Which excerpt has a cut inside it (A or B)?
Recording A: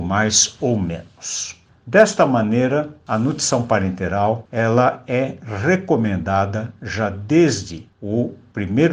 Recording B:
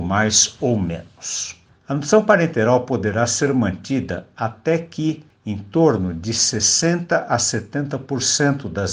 B